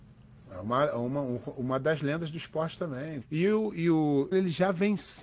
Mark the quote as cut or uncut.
cut